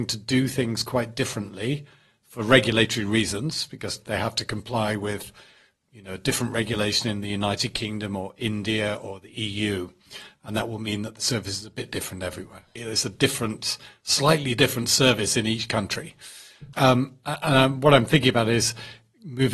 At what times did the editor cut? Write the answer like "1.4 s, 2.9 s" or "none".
12.8 s, 16.7 s